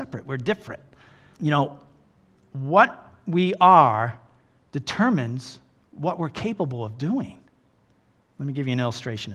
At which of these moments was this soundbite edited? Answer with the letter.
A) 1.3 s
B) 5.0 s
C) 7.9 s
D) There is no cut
A